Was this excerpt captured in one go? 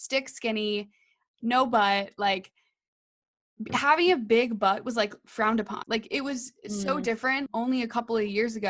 no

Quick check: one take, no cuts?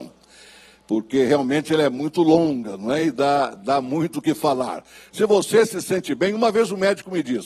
yes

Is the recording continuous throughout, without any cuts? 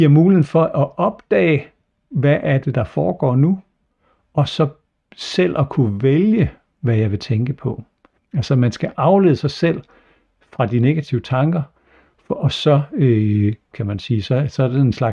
no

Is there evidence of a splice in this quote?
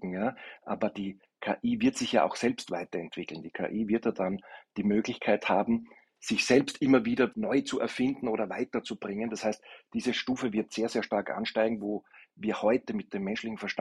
no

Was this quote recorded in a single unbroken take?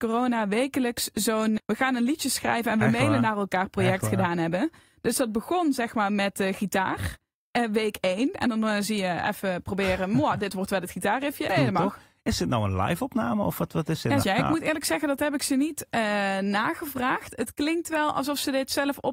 no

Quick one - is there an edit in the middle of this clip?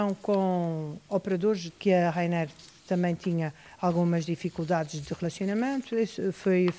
yes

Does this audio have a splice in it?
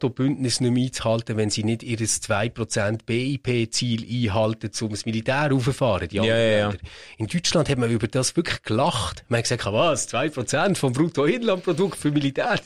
no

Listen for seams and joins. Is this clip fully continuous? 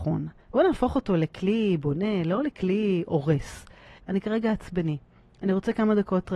no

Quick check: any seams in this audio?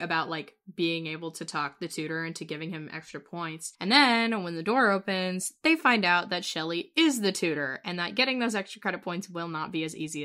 yes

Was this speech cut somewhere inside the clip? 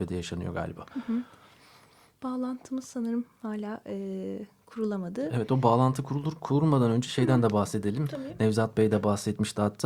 no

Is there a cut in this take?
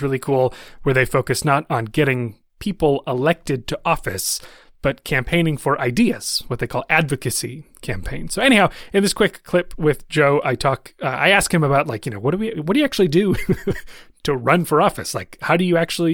no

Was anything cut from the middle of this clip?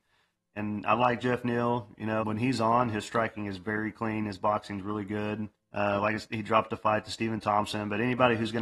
yes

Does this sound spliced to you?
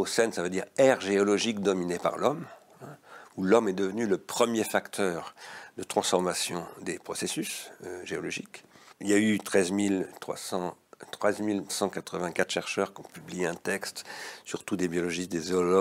yes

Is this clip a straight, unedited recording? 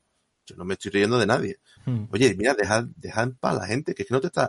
no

